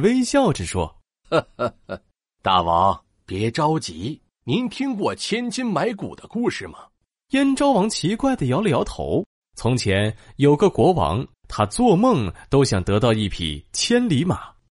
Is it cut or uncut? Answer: cut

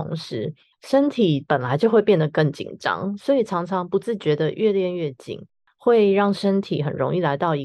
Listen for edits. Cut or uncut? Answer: uncut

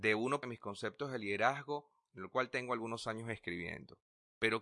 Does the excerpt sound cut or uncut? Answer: uncut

